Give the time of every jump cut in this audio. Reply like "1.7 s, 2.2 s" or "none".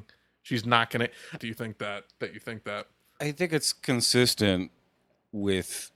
1.4 s